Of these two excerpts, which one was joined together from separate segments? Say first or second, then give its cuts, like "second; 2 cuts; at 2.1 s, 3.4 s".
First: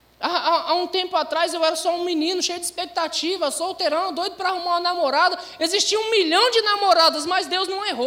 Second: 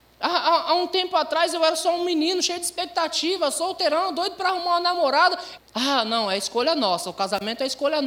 second; 1 cut; at 5.6 s